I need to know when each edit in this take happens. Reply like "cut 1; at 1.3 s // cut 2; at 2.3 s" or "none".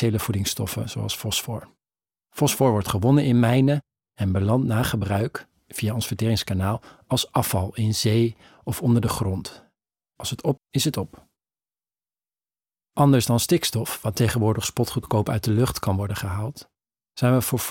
cut 1; at 10.6 s

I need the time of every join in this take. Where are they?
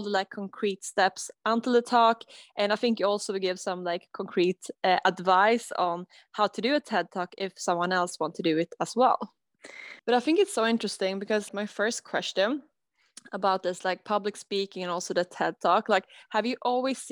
cut 1; at 10.0 s // cut 2; at 11.5 s

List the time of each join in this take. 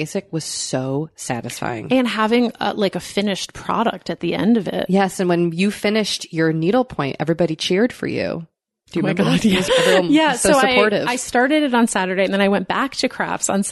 cut 1; at 9.7 s

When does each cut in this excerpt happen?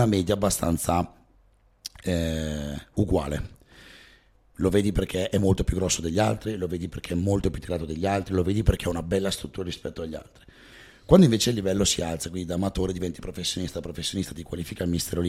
none

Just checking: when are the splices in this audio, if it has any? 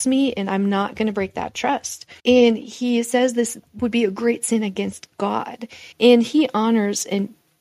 cut 1; at 2.2 s // cut 2; at 5.9 s

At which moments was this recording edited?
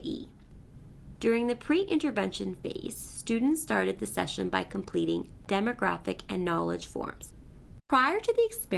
cut 1; at 1.2 s // cut 2; at 7.8 s

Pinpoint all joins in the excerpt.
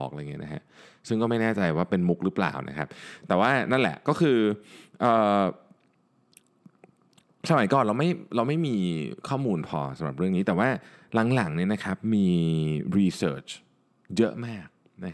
none

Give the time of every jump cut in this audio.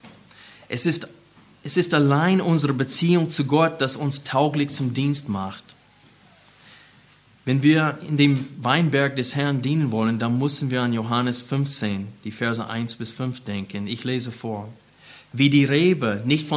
none

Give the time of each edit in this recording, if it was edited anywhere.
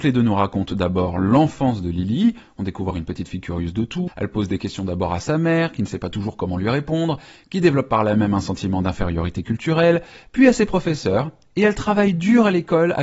cut 1; at 2.9 s // cut 2; at 4.1 s

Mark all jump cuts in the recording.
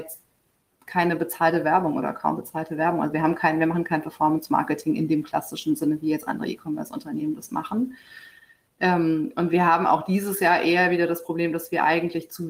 none

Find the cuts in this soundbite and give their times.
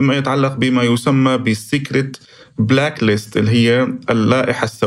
none

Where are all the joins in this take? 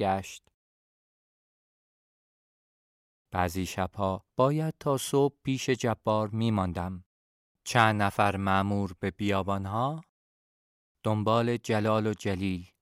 cut 1; at 4.3 s // cut 2; at 7.5 s

